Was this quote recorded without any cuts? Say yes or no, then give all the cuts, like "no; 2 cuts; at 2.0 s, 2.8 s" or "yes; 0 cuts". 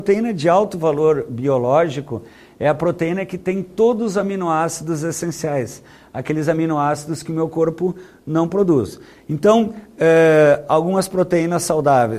yes; 0 cuts